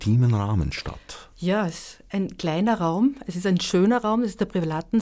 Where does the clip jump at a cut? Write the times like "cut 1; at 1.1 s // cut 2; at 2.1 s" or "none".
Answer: none